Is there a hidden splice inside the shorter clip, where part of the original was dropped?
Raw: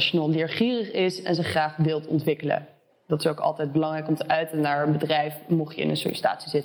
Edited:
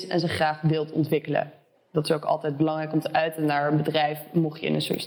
no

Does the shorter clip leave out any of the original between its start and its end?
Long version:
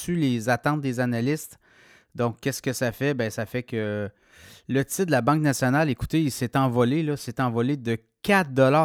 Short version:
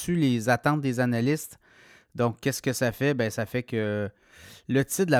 no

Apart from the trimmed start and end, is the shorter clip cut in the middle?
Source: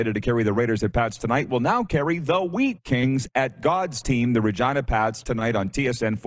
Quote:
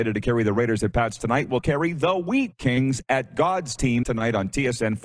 yes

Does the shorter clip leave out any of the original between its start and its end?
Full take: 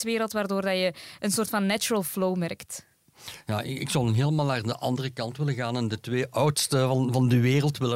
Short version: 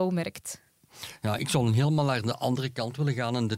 yes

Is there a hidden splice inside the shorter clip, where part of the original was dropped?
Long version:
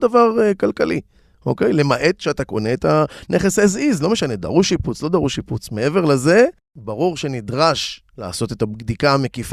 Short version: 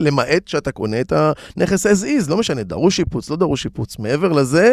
no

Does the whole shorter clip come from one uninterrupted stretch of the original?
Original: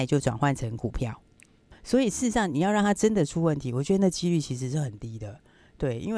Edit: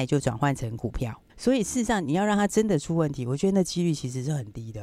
no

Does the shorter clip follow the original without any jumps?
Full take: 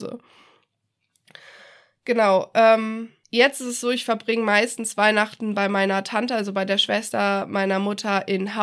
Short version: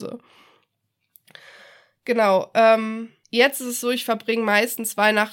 yes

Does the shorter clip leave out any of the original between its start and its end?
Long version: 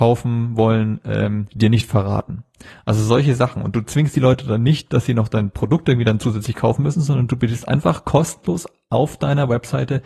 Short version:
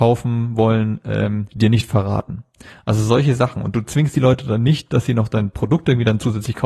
no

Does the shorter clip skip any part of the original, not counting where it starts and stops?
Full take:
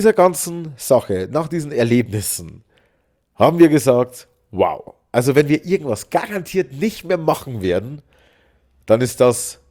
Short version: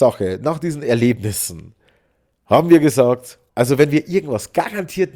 yes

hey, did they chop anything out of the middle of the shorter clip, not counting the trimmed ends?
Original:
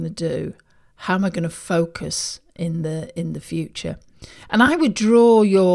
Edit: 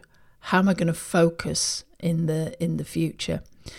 no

